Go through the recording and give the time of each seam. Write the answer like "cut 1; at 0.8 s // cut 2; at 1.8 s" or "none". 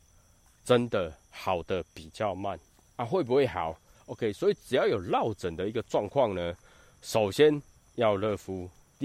cut 1; at 3.9 s